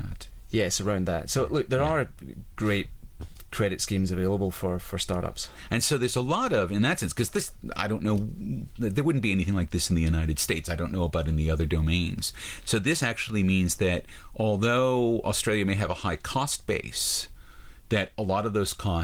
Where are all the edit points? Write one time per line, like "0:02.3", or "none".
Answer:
none